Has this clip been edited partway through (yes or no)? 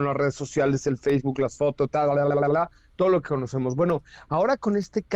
no